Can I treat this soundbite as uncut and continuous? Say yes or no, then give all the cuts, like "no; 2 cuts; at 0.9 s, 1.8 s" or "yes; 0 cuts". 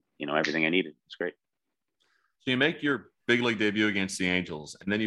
yes; 0 cuts